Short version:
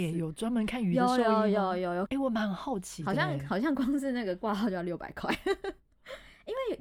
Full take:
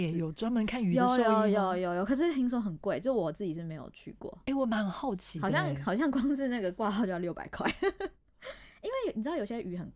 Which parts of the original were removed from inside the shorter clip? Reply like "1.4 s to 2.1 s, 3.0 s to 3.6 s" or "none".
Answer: 2.1 s to 4.4 s